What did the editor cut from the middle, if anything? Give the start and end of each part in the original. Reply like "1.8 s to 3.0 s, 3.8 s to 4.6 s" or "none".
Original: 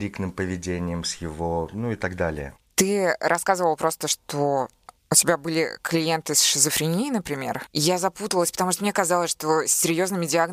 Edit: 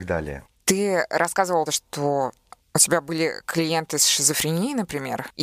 3.8 s to 4.0 s